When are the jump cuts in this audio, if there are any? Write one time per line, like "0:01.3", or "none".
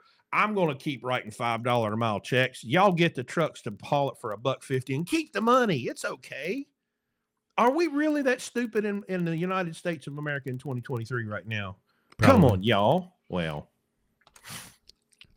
0:13.2